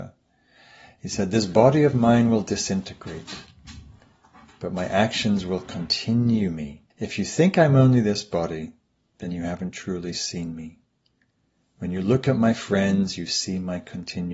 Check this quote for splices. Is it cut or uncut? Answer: cut